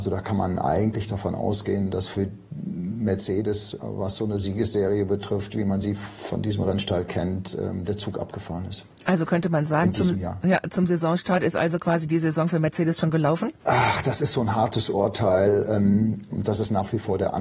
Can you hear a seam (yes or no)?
yes